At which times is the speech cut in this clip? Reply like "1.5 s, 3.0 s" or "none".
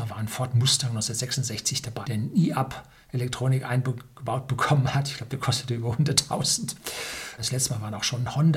2.0 s, 7.4 s